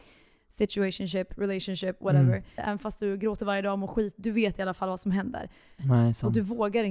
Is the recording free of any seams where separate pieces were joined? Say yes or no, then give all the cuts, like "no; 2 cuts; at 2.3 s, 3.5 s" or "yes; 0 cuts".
no; 2 cuts; at 2.6 s, 5.8 s